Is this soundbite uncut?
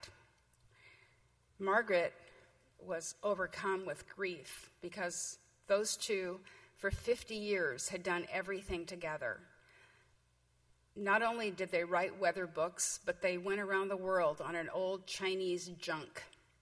yes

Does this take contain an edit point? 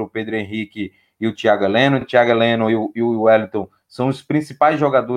no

